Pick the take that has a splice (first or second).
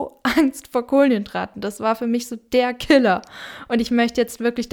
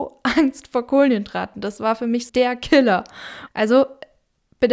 second